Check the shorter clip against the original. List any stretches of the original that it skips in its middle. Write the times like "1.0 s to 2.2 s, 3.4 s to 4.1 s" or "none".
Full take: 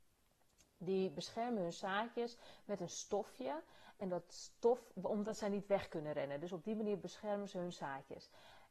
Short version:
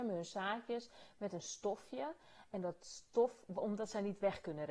none